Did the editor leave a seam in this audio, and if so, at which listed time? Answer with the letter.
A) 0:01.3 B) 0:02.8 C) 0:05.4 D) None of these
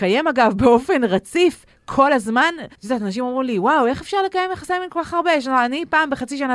B